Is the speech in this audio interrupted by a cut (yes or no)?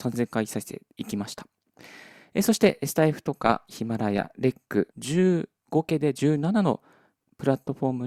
yes